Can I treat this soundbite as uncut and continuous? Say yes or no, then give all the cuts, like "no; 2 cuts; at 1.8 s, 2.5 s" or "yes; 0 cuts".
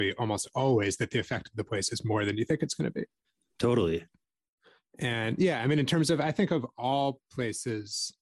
yes; 0 cuts